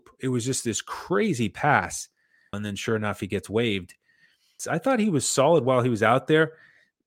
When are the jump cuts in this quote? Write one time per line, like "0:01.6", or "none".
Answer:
0:02.5
0:04.6